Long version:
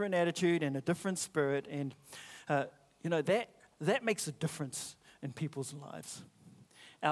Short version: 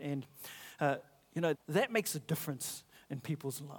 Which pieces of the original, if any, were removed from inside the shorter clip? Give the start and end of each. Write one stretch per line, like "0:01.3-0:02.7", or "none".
0:03.2-0:03.7